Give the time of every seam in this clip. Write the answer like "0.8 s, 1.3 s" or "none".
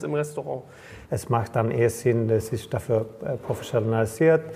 1.1 s, 2.3 s